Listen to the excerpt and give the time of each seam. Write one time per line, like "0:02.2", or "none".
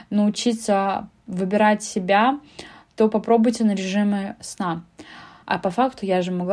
0:05.4